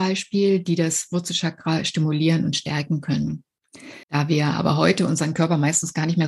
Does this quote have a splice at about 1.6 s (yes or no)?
no